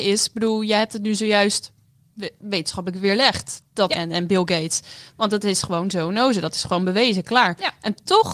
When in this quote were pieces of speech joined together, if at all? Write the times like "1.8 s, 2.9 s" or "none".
3.9 s